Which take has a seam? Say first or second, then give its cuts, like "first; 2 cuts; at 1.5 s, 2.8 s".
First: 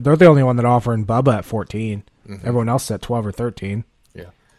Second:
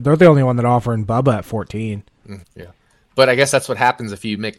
second; 1 cut; at 2.4 s